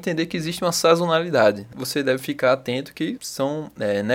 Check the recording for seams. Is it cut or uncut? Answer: cut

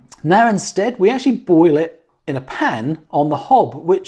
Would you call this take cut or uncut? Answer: uncut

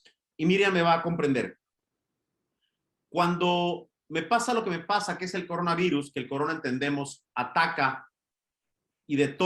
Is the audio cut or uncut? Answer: uncut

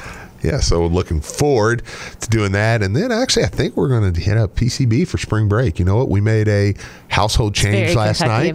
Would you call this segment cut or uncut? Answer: cut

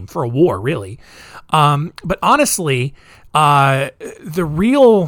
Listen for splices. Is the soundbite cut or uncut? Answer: uncut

